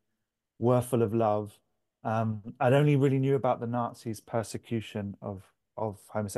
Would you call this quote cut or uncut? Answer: uncut